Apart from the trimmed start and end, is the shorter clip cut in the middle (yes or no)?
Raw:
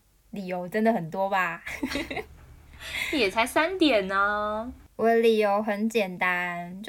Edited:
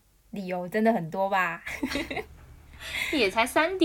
no